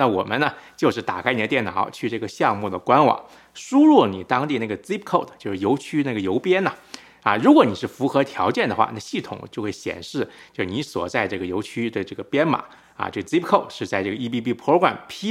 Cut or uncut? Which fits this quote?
uncut